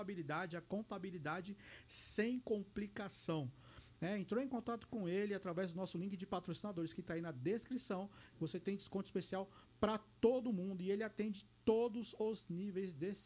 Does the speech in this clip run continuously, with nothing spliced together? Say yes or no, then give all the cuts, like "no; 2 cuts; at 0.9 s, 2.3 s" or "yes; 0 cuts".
no; 2 cuts; at 3.9 s, 8.3 s